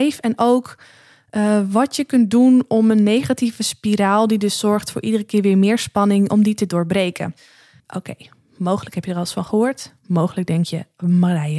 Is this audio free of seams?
no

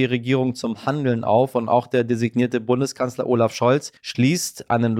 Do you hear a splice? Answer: yes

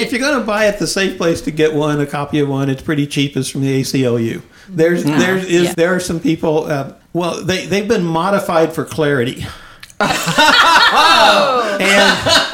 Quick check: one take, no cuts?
no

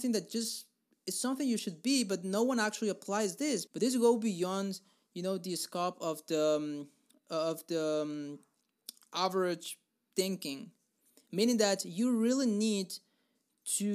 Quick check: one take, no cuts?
no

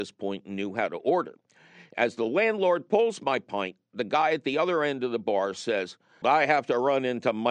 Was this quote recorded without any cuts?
no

